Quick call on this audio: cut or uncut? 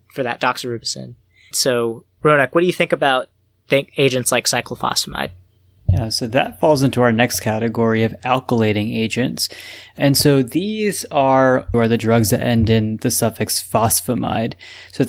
cut